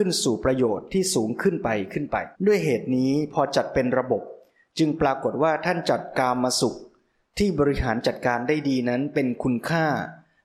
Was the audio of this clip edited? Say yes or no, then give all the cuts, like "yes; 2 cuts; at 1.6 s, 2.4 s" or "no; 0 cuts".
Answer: yes; 1 cut; at 2.3 s